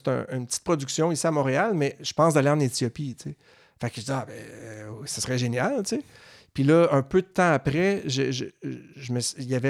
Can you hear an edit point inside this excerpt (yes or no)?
no